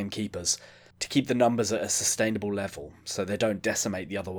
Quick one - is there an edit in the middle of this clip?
yes; 1 cut; at 0.9 s

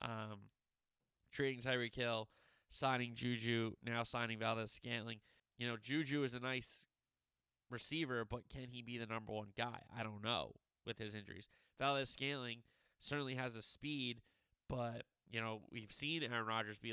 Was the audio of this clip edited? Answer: yes; 1 cut; at 5.4 s

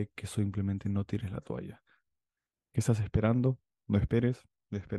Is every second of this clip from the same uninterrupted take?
no; 1 cut; at 2.5 s

